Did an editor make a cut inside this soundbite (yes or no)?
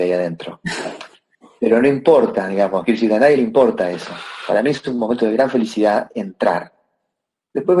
no